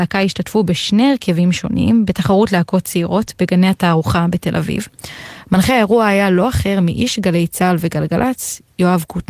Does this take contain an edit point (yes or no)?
no